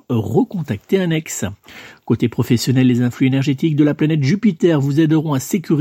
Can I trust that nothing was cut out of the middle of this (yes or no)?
yes